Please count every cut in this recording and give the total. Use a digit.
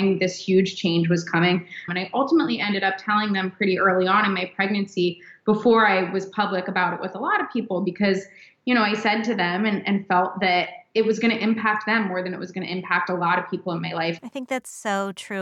2